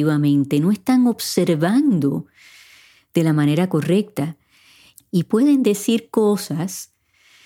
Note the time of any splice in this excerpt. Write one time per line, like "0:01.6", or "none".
0:05.0